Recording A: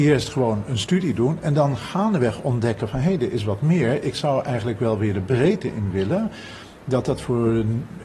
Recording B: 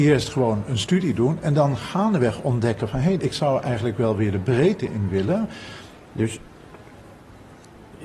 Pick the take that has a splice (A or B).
B